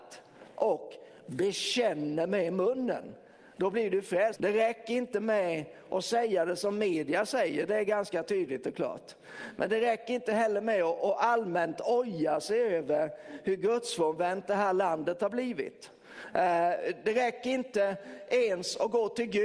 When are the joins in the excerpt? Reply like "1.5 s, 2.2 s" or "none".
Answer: 4.4 s